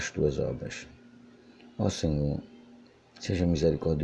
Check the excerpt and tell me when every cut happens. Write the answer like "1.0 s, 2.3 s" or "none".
none